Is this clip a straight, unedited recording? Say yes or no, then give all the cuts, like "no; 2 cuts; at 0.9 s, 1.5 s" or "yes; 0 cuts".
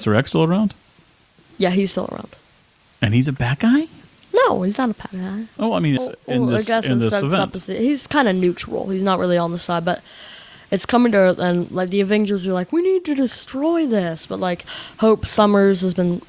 no; 1 cut; at 6.0 s